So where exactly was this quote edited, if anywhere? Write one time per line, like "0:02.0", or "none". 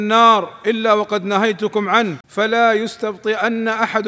0:02.2